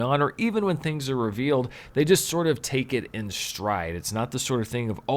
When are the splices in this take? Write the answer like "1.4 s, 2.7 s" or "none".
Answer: none

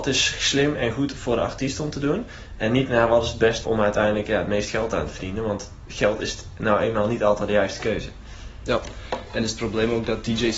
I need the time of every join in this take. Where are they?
3.6 s

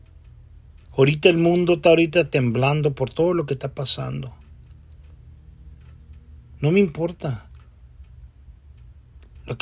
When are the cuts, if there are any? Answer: 6.6 s

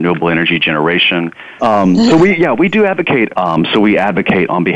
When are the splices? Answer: 1.6 s, 3.3 s

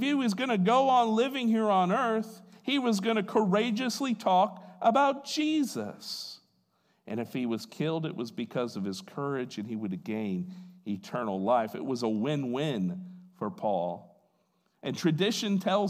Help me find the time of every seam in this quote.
none

